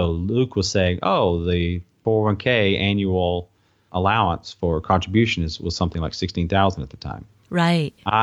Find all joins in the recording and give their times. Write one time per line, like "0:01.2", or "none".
none